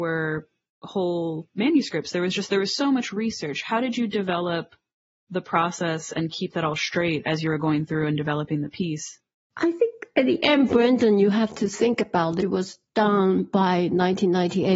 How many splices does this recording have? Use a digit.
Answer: 0